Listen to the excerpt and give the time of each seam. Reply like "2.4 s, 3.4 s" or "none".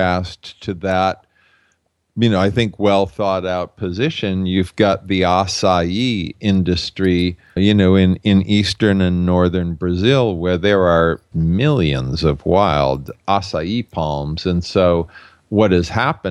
7.6 s, 11.3 s